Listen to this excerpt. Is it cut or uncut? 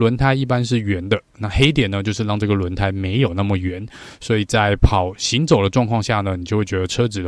uncut